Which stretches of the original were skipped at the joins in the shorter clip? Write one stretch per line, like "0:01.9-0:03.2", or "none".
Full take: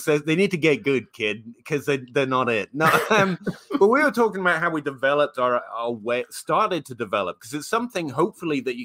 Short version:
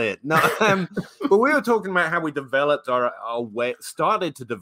none